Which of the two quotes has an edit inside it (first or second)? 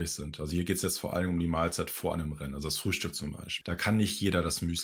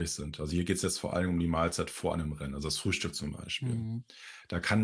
first